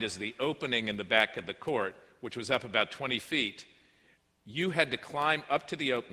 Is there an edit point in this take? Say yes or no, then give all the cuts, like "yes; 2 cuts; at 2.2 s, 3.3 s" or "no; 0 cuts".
no; 0 cuts